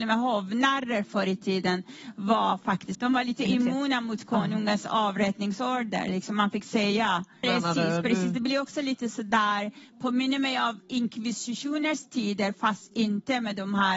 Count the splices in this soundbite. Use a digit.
2